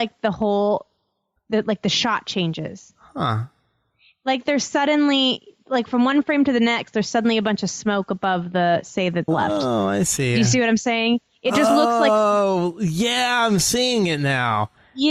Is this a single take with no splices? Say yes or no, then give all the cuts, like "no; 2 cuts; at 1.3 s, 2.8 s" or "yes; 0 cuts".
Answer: no; 1 cut; at 9.3 s